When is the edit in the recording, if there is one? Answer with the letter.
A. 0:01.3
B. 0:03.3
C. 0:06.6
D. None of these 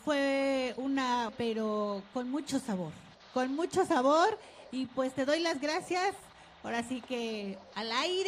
A